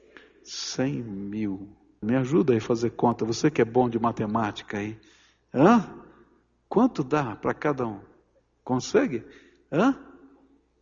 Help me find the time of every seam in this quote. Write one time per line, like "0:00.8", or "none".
0:02.0